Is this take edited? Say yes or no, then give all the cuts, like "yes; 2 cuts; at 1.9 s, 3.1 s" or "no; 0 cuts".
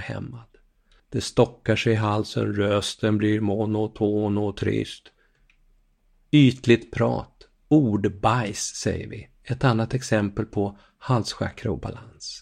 yes; 1 cut; at 1.0 s